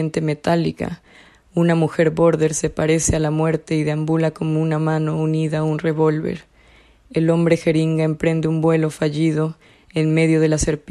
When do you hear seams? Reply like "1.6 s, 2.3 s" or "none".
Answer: none